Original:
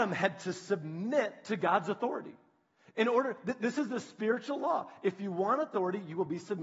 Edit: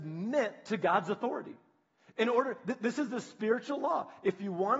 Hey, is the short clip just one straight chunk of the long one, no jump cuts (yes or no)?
yes